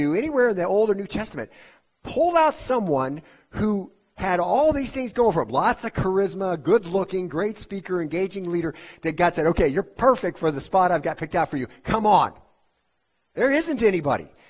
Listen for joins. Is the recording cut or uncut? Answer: uncut